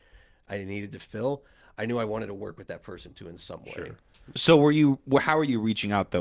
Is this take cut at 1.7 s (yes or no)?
no